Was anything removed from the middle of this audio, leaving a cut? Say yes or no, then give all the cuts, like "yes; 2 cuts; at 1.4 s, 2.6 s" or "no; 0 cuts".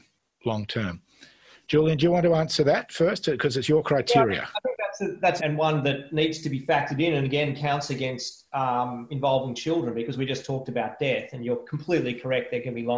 yes; 1 cut; at 5.4 s